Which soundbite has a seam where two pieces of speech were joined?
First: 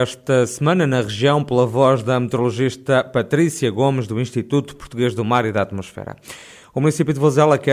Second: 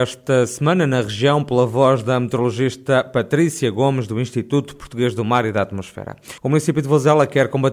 second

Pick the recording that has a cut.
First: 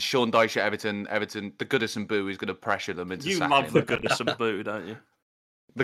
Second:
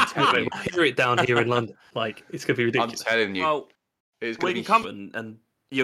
second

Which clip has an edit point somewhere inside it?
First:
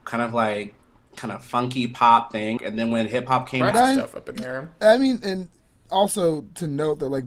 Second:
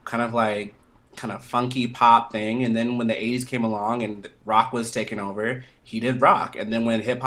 first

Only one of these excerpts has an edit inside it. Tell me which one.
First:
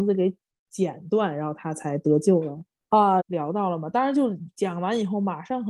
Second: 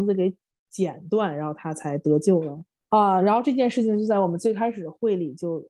first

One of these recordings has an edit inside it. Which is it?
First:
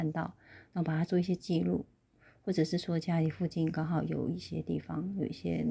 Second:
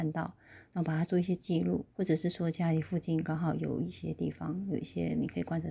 second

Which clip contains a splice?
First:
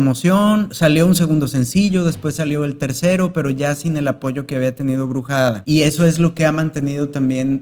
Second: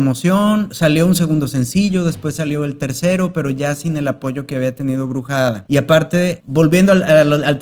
first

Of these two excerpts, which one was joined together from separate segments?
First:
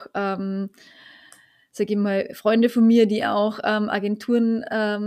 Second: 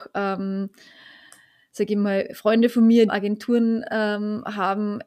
second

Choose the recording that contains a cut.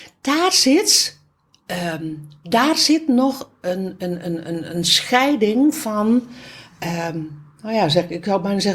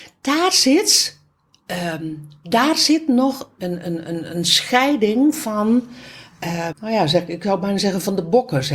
second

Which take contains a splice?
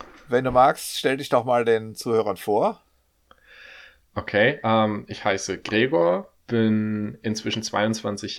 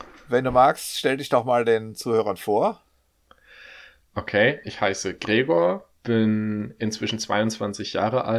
second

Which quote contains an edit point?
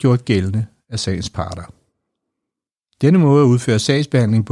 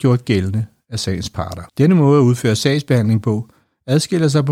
second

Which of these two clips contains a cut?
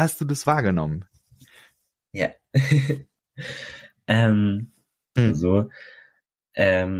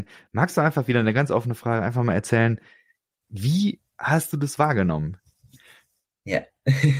first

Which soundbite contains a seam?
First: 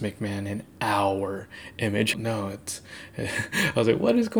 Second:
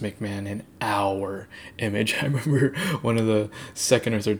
first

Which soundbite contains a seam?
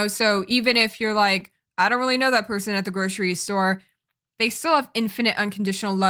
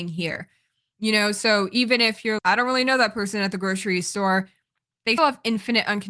second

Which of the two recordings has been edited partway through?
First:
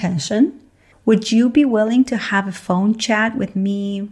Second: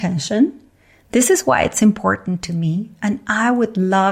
first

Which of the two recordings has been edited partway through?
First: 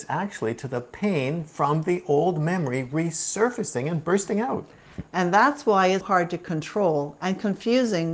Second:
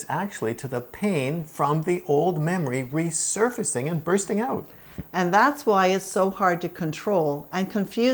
first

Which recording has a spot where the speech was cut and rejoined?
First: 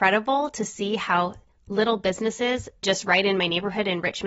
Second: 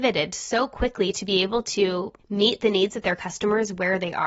first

